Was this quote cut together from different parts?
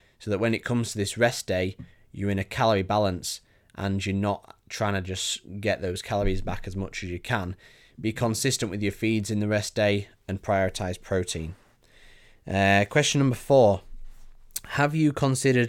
no; 0 cuts

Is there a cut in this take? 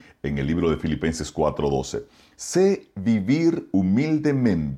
no; 0 cuts

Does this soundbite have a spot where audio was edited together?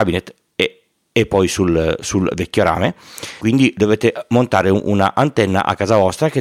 yes; 1 cut; at 3.4 s

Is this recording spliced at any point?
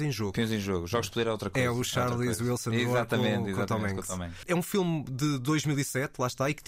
no; 0 cuts

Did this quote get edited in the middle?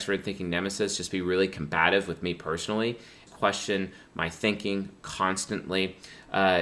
yes; 1 cut; at 3.3 s

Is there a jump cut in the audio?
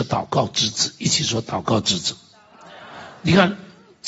no; 0 cuts

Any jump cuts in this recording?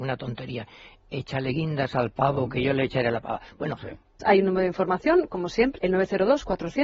yes; 2 cuts; at 4.2 s, 5.8 s

